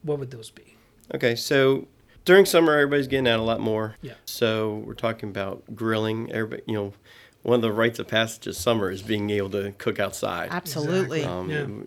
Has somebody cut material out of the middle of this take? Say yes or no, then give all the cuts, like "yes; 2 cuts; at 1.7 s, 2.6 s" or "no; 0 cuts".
yes; 1 cut; at 3.9 s